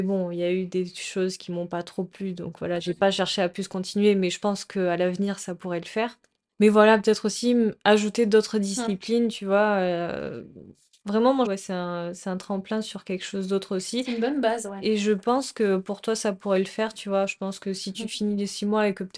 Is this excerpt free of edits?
no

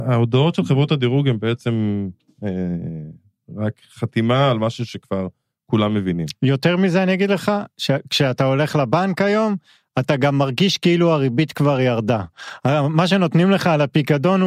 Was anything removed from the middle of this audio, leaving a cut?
no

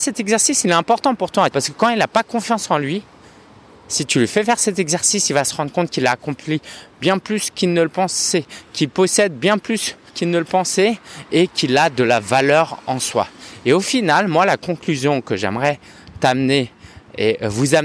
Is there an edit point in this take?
yes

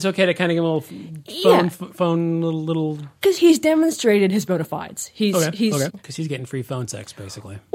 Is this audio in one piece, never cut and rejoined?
no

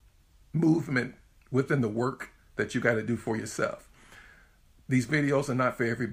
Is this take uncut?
yes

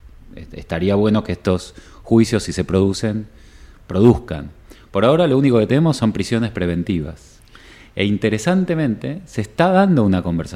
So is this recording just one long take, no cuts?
yes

